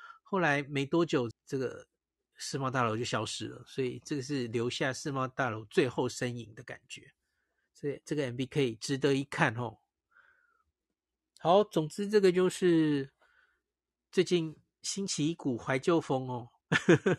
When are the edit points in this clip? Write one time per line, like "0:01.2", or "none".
0:01.3